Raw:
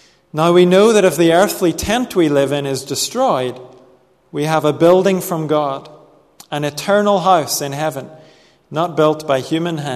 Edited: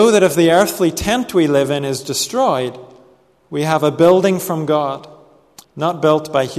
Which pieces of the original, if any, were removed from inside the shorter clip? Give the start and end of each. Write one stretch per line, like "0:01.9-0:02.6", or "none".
0:06.4-0:08.6